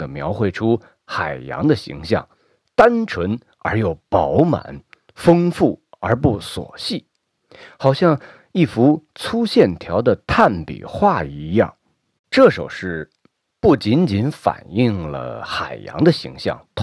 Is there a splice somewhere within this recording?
yes; 1 cut; at 12.3 s

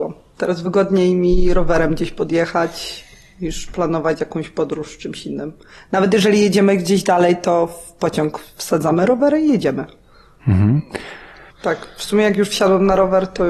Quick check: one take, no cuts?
no; 1 cut; at 11.5 s

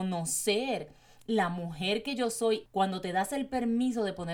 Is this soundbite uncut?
no; 1 cut; at 2.7 s

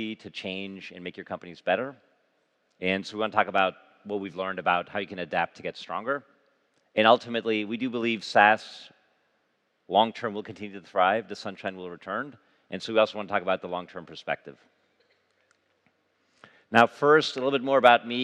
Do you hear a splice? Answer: no; 0 cuts

